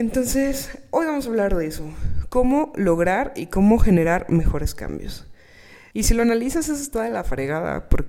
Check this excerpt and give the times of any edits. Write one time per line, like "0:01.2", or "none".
0:05.9